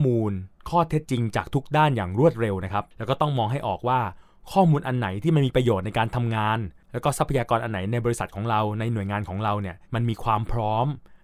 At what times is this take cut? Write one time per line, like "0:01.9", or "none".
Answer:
0:01.0
0:06.8
0:09.8